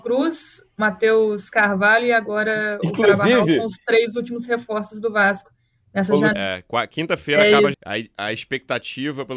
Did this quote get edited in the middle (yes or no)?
yes